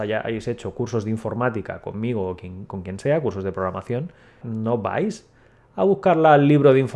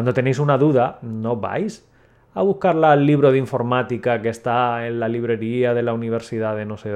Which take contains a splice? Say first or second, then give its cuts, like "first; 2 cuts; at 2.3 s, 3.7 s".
first; 1 cut; at 4.4 s